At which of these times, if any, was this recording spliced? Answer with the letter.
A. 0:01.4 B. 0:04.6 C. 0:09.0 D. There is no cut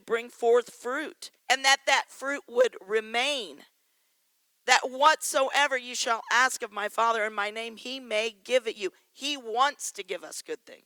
A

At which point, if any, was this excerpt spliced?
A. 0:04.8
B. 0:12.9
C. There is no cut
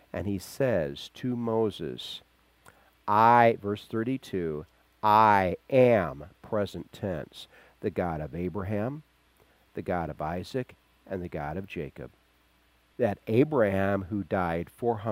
B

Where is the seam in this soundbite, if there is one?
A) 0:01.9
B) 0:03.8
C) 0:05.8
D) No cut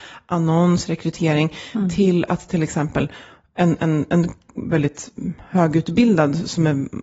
D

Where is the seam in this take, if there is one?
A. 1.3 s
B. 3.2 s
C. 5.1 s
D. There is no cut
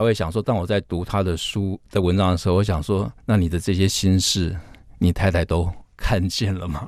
B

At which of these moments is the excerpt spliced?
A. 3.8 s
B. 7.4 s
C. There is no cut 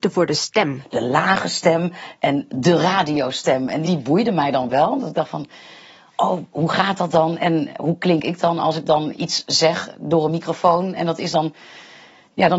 A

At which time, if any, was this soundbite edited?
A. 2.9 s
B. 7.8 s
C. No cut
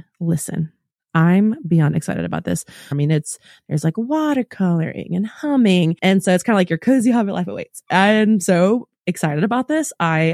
A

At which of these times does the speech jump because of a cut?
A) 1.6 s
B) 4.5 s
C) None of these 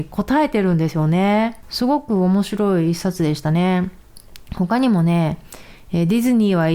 A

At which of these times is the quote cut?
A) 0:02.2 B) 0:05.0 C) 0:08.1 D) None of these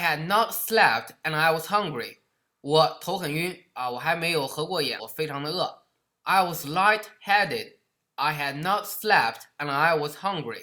B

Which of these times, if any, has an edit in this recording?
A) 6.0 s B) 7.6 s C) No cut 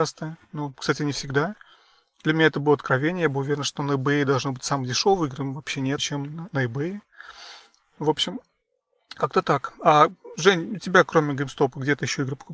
A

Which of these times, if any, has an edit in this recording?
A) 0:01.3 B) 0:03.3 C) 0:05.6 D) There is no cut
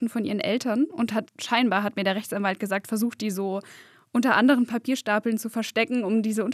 A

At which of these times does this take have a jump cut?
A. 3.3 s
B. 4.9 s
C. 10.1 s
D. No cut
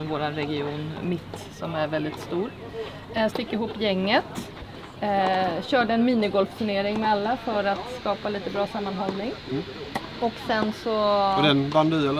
A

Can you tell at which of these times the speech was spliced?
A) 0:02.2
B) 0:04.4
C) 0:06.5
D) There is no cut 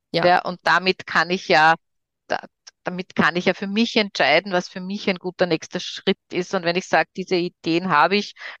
A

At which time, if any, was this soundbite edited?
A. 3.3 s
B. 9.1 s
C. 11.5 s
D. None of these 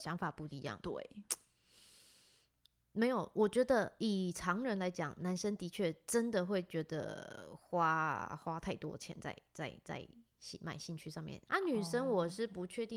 C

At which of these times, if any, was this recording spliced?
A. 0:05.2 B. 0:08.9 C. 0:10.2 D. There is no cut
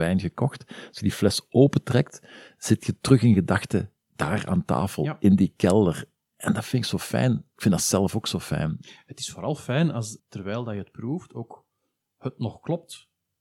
C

